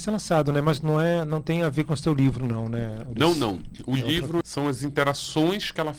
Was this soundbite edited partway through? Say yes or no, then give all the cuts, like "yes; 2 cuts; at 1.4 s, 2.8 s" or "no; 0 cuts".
yes; 1 cut; at 4.4 s